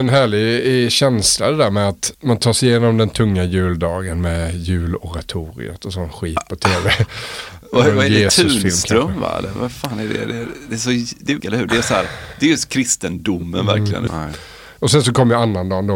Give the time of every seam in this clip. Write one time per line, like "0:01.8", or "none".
0:11.4
0:14.1